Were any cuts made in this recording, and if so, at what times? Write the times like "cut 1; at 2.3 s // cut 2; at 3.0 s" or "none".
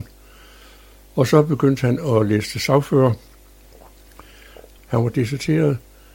cut 1; at 4.8 s

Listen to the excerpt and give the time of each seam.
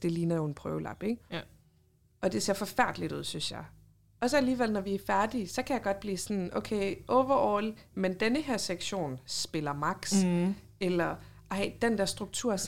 cut 1; at 7.9 s

